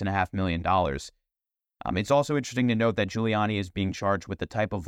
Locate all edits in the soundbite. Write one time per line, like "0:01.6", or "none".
none